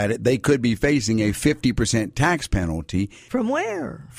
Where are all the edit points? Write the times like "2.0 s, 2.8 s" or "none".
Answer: 3.3 s